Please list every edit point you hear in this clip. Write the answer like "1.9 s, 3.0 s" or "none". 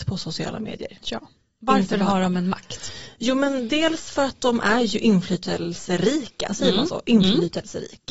none